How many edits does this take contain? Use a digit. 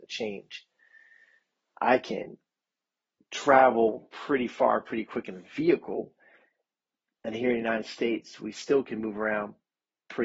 0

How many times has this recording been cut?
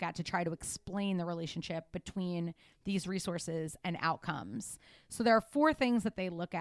0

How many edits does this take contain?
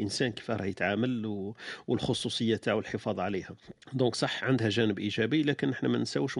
1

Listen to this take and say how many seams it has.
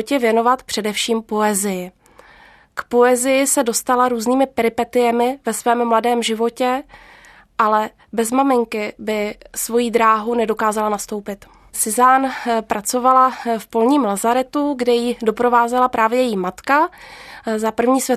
1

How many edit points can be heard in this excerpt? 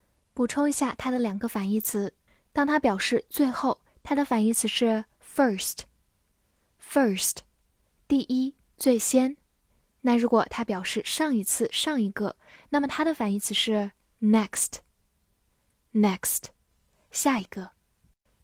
0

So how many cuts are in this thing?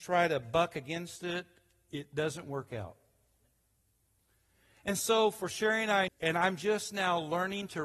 1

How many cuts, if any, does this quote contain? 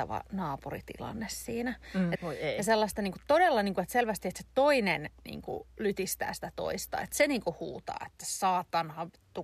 1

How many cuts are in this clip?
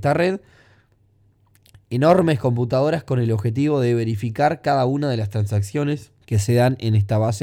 1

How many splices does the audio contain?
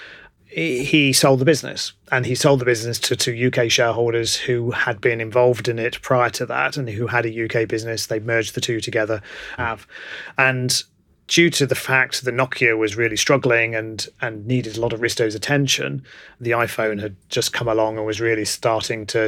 1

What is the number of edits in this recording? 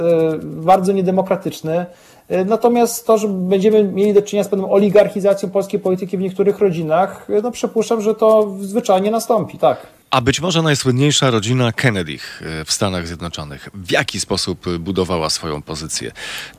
1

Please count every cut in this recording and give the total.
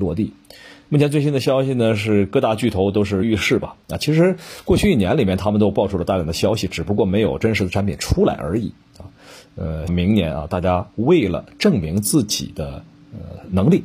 2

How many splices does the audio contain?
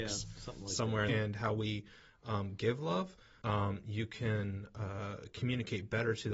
2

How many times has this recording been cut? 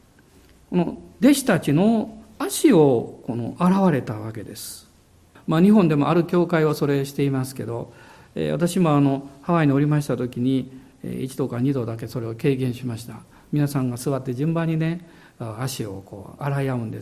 1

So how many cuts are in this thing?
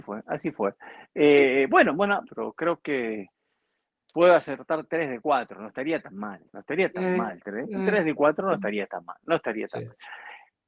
1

